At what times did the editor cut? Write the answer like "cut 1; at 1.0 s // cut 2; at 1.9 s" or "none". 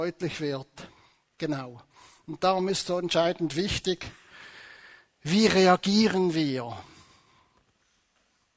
none